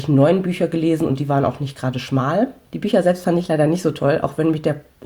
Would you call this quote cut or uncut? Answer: uncut